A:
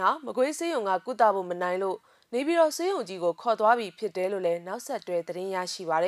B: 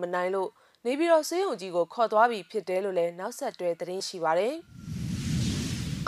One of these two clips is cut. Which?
B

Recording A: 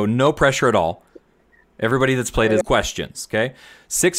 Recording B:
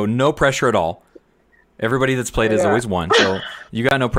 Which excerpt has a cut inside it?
A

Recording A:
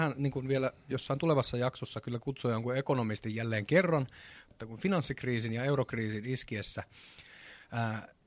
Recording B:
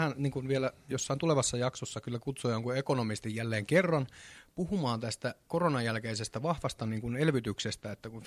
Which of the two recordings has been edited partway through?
A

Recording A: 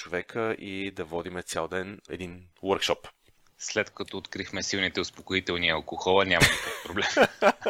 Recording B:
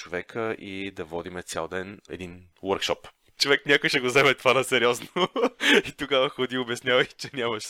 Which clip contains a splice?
B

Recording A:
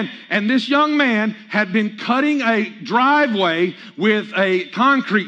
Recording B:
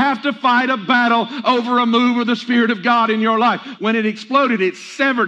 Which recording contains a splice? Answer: B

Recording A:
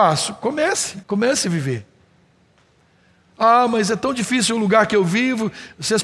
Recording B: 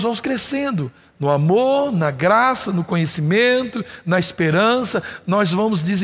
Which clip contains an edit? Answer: A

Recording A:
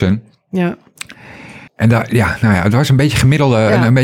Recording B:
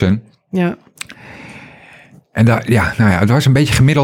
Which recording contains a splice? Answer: A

